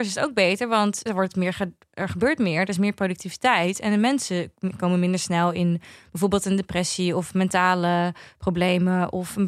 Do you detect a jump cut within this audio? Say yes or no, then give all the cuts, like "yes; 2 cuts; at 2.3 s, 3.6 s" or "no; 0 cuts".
yes; 1 cut; at 1.1 s